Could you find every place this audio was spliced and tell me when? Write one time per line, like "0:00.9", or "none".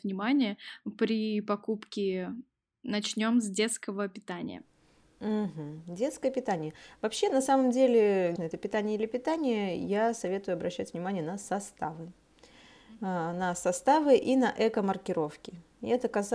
0:08.4